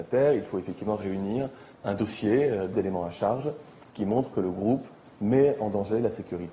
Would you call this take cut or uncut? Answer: cut